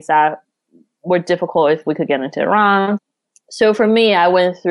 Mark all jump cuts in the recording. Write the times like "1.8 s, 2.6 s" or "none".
none